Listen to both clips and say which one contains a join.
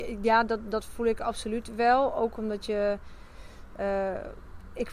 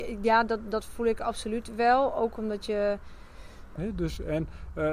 second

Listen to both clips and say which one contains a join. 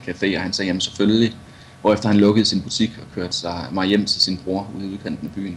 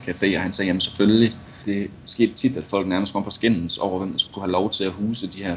second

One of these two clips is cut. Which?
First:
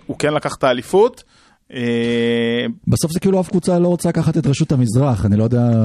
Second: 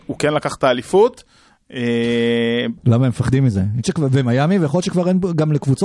second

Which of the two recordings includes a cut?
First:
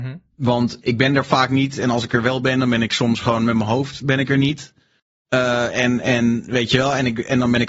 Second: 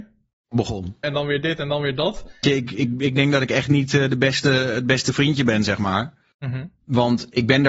second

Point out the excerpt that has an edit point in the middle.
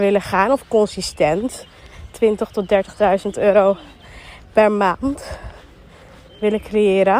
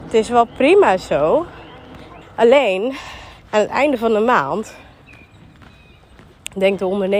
second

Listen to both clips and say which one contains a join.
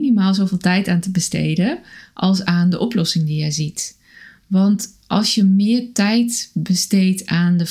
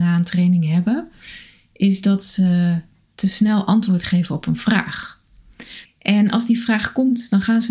second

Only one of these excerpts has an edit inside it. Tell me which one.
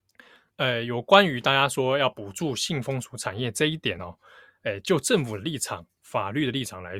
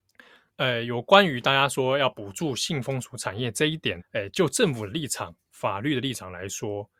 second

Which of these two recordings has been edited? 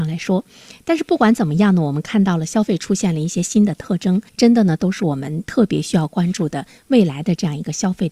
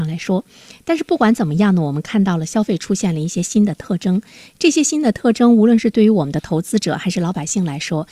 first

